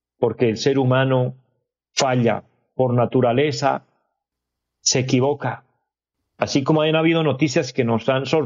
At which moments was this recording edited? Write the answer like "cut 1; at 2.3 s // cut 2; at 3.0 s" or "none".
cut 1; at 6.2 s